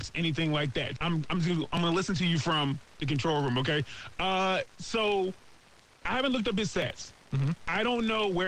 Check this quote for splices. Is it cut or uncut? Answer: cut